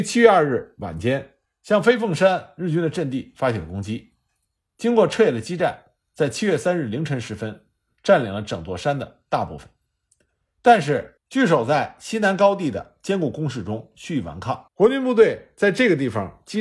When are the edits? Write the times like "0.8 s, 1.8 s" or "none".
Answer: 11.2 s, 14.7 s